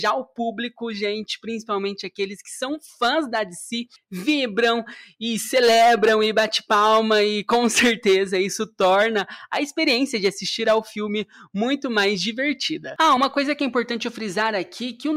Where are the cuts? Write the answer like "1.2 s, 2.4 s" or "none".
none

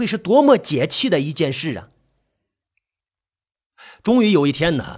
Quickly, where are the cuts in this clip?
none

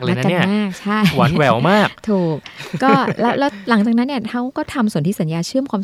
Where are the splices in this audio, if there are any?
none

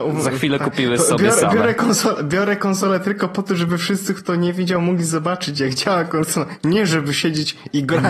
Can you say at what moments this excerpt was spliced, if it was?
none

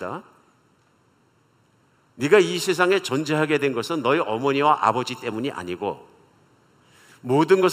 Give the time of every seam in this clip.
2.1 s

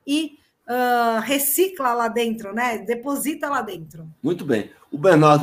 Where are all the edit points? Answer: 4.2 s

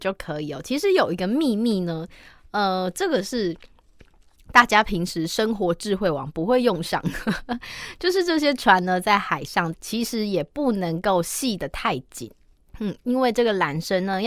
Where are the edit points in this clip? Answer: 9.7 s

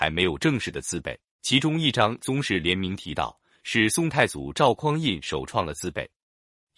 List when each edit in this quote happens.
1.4 s

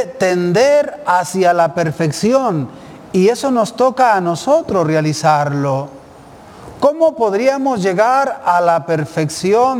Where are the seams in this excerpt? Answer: none

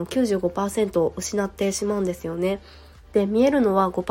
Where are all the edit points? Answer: none

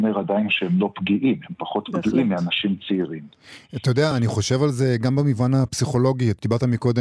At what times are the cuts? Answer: none

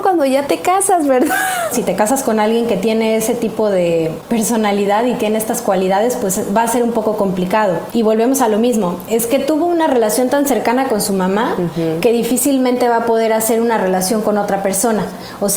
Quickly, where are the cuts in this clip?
1.7 s

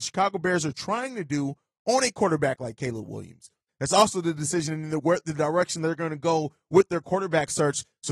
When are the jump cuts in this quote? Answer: 3.7 s

